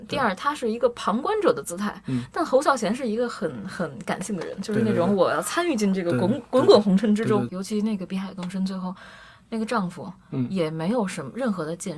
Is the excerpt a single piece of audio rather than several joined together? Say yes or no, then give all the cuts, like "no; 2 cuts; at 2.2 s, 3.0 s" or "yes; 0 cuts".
no; 1 cut; at 7.5 s